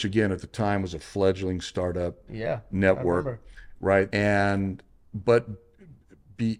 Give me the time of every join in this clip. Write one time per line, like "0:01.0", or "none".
0:04.1